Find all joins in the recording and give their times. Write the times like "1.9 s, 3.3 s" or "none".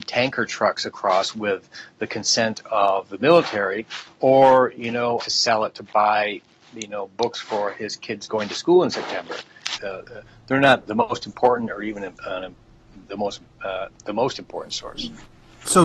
5.2 s, 9.8 s